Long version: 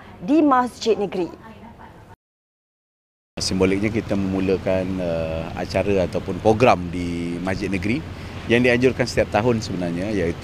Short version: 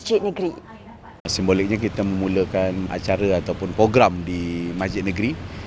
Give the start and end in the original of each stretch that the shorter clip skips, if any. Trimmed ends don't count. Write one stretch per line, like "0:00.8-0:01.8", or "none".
0:02.0-0:03.3
0:05.0-0:05.5